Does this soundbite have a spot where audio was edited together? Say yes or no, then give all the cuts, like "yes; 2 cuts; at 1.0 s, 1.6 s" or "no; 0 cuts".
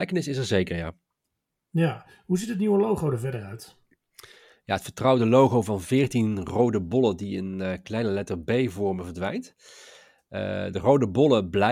no; 0 cuts